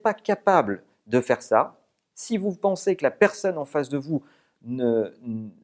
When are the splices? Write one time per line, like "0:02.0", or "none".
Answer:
none